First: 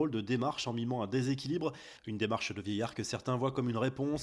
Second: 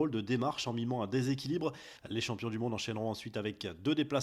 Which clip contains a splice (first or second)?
second